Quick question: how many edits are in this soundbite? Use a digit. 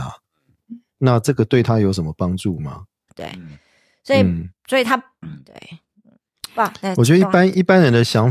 2